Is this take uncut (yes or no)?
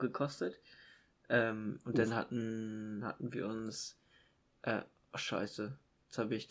yes